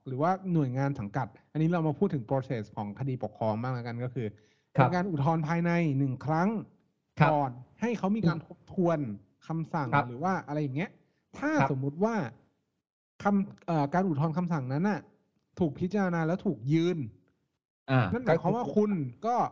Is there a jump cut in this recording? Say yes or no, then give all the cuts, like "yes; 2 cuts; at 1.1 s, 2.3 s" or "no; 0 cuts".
no; 0 cuts